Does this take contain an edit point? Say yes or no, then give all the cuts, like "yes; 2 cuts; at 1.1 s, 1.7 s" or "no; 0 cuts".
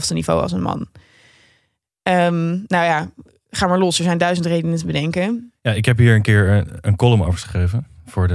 no; 0 cuts